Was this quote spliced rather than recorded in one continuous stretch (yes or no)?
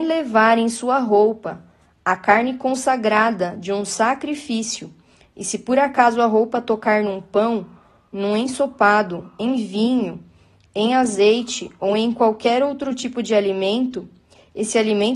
no